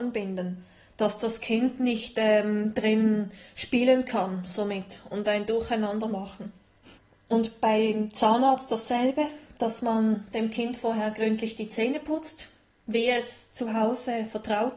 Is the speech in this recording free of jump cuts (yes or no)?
yes